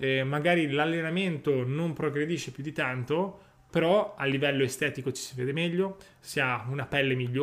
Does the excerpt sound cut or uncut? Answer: uncut